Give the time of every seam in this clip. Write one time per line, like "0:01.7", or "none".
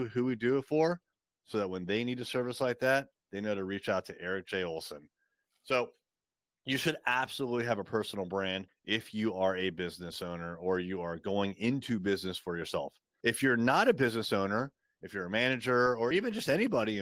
none